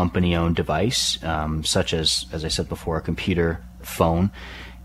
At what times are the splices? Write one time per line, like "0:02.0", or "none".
0:03.8